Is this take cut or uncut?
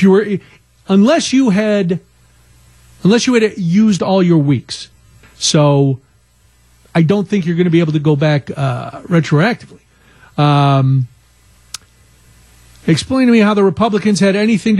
cut